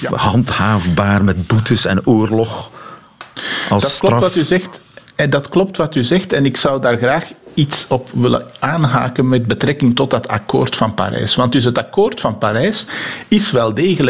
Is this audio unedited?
yes; 0 cuts

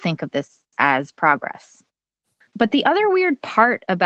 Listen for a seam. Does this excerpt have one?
yes; 1 cut; at 2.4 s

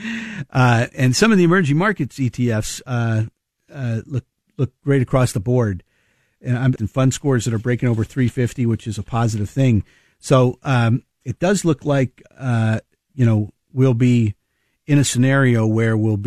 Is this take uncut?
no; 1 cut; at 6.8 s

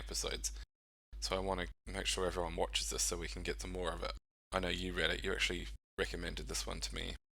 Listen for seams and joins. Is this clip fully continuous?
yes; 0 cuts

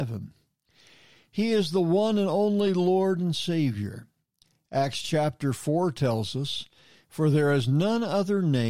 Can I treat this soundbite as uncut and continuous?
no; 1 cut; at 7.0 s

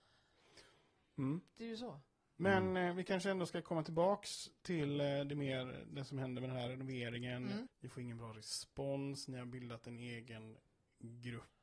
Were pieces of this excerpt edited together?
yes; 1 cut; at 7.7 s

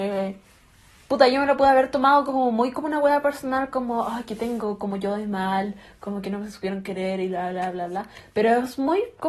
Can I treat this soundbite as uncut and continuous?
yes; 0 cuts

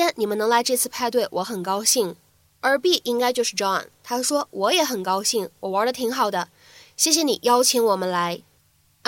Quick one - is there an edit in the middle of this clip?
no; 0 cuts

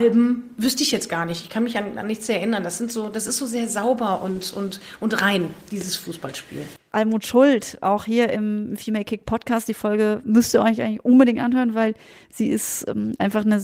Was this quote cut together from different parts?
no; 0 cuts

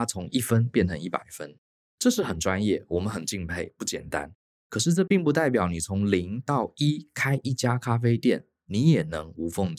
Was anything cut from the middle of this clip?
no; 0 cuts

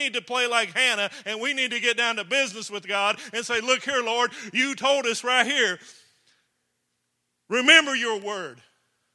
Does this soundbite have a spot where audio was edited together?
no; 0 cuts

